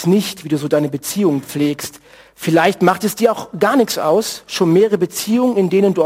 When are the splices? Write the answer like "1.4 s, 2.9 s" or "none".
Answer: none